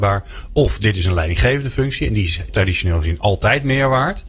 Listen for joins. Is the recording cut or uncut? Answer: cut